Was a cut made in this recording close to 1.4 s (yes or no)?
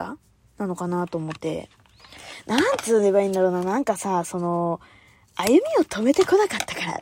yes